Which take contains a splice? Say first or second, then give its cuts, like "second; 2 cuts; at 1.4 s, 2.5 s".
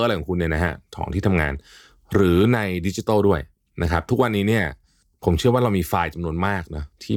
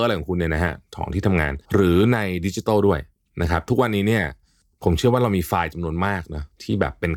second; 1 cut; at 1.6 s